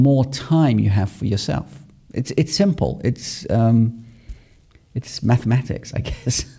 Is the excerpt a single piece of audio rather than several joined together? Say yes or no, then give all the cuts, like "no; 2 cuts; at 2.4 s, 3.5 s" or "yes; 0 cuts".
yes; 0 cuts